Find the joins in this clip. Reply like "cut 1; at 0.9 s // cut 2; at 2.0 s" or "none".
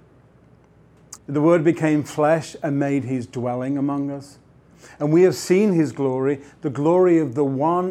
cut 1; at 1.2 s